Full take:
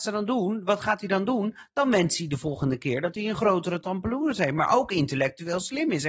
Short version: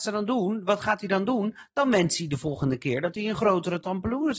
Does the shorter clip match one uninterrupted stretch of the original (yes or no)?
yes